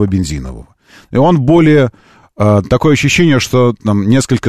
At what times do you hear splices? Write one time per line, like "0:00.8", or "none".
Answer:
none